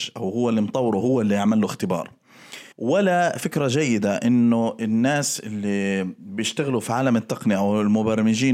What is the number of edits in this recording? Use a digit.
1